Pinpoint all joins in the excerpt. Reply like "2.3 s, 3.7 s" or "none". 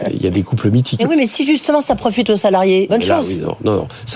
1.0 s, 2.9 s